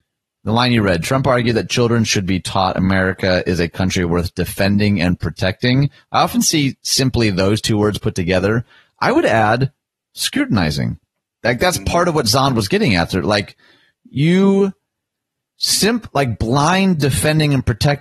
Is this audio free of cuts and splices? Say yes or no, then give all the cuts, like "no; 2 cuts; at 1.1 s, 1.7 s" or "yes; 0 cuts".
yes; 0 cuts